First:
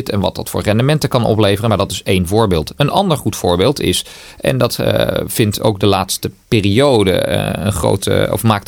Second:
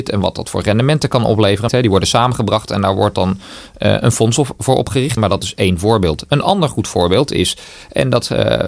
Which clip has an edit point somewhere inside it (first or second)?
second